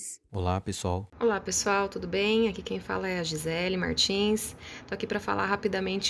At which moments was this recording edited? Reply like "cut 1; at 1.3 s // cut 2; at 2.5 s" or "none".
cut 1; at 1.1 s